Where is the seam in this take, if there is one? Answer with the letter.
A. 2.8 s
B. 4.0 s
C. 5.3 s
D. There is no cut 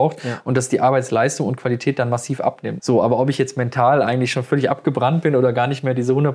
A